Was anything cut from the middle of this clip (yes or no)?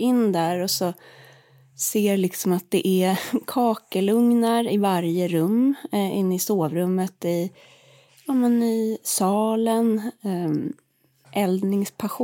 yes